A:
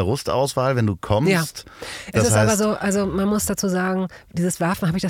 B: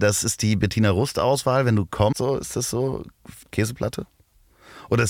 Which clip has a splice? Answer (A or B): B